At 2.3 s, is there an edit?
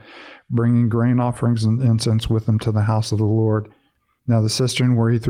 no; 1 cut; at 4.2 s

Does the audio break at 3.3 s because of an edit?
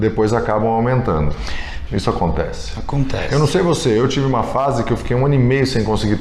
no; 1 cut; at 1.9 s

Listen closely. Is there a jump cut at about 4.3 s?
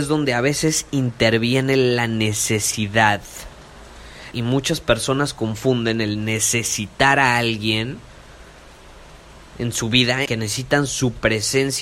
yes; 2 cuts; at 4.3 s, 10.3 s

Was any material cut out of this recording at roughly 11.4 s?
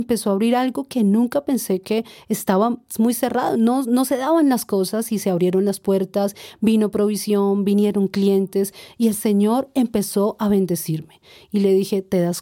no; 0 cuts

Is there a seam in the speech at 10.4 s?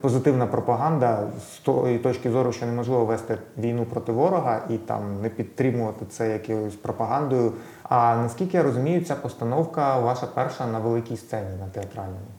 no; 1 cut; at 7.8 s

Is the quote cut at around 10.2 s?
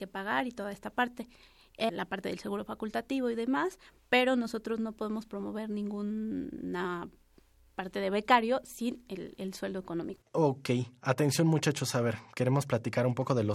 yes; 2 cuts; at 1.9 s, 10.2 s

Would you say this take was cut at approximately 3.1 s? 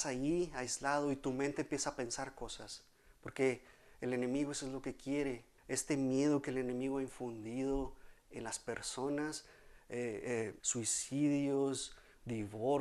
no; 2 cuts; at 5.6 s, 10.6 s

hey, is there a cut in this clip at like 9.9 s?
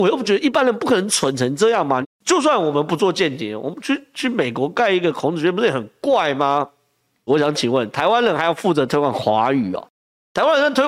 no; 2 cuts; at 2.0 s, 7.3 s

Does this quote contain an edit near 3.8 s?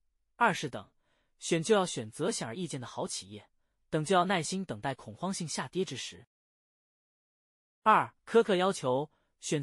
no; 1 cut; at 8.2 s

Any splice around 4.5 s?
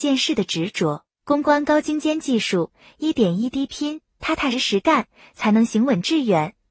yes; 1 cut; at 4.5 s

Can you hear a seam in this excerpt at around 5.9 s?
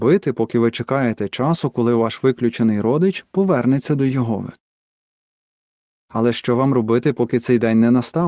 yes; 1 cut; at 5.9 s

